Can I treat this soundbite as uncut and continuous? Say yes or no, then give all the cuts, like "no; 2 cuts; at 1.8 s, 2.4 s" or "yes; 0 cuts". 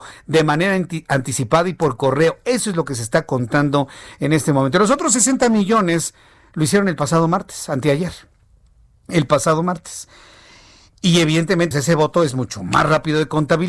no; 1 cut; at 11.7 s